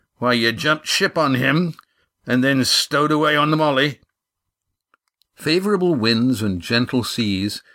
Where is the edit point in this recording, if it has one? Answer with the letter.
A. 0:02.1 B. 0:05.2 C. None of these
B